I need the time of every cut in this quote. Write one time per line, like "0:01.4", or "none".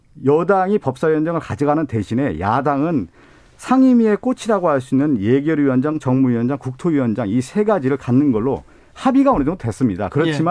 none